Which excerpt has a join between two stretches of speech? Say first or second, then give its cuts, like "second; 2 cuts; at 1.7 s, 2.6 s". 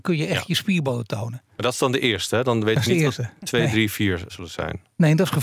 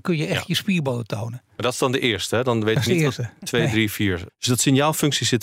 second; 1 cut; at 4.3 s